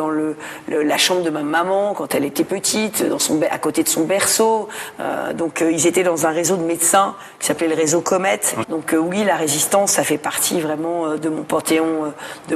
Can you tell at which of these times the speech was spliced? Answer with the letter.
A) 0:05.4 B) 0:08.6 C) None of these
B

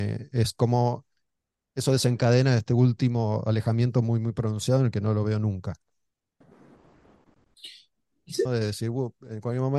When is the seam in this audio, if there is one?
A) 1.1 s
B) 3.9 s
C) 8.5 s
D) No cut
C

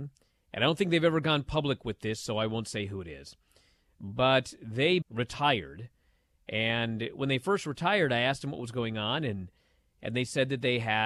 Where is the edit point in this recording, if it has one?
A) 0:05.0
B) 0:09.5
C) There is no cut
A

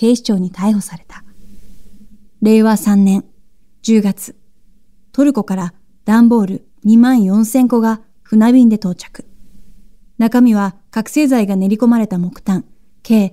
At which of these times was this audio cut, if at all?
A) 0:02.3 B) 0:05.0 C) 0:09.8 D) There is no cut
A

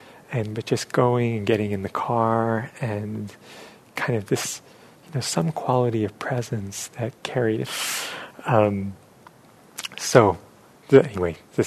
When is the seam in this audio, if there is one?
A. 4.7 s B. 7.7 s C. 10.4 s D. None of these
B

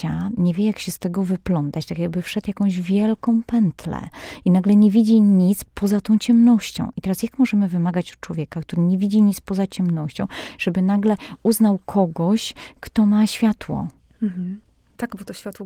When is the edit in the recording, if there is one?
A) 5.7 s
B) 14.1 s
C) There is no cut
A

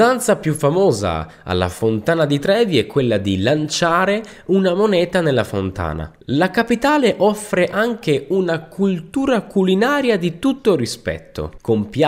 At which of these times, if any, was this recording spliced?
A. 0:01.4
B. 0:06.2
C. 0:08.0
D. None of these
B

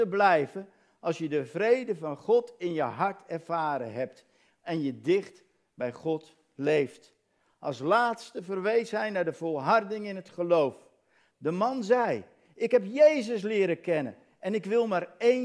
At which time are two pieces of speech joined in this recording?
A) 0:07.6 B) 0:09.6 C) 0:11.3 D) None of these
C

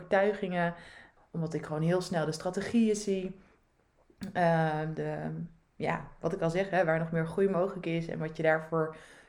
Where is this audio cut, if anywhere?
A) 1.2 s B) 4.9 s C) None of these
A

